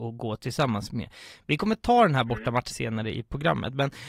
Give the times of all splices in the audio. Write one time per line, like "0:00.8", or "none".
0:01.4
0:02.7